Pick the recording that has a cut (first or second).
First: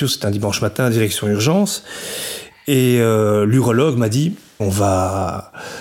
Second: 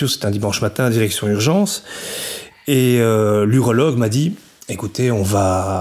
first